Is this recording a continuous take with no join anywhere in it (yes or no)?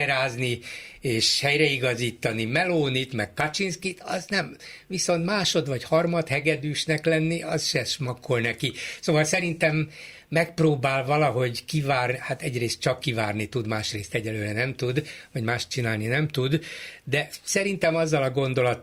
yes